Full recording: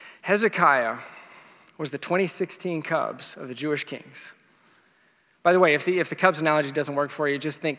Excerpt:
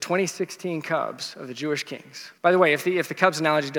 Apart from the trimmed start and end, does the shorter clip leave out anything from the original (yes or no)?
yes